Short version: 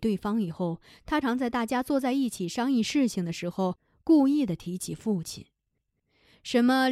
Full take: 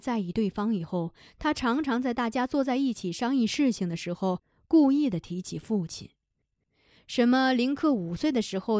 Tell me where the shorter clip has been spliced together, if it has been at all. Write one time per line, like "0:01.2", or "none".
0:01.2